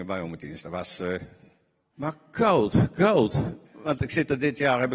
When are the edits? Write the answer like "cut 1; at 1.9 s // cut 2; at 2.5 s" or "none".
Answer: cut 1; at 1.9 s // cut 2; at 3.6 s